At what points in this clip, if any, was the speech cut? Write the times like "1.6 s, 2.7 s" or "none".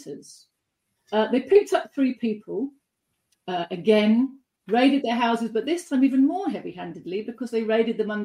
1.0 s, 3.3 s